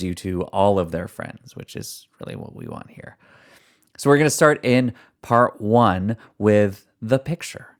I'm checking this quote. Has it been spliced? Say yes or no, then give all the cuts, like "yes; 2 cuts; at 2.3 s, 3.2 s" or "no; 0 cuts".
no; 0 cuts